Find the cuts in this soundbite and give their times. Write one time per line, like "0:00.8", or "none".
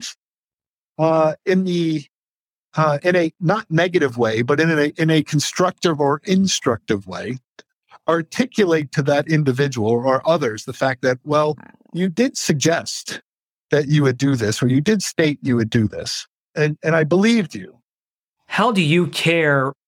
0:03.0
0:16.5
0:18.3

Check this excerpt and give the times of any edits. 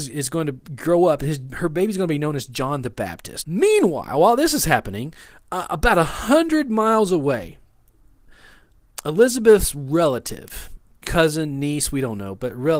0:03.4

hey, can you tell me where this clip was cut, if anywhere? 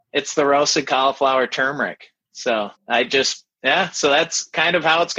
0:02.8

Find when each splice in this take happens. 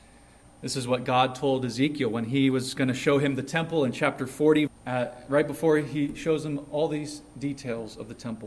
0:04.7

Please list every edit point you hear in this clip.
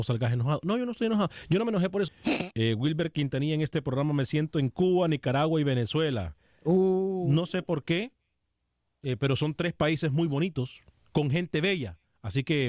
0:02.1

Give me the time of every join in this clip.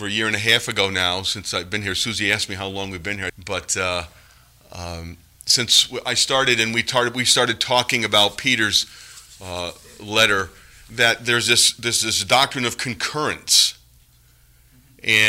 0:03.3

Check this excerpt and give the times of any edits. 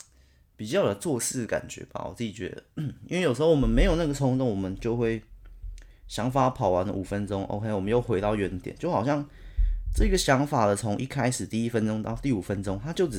none

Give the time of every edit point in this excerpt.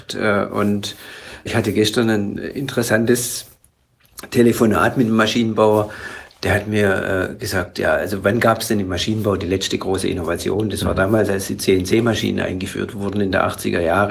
0:01.5

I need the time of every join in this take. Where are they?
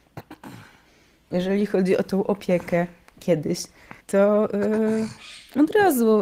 0:04.0

